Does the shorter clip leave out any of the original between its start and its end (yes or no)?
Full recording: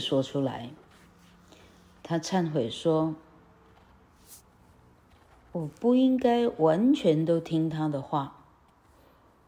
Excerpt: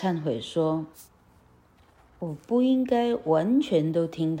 yes